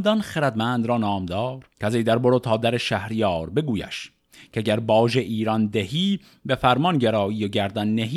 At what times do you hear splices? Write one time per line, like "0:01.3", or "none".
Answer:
0:01.7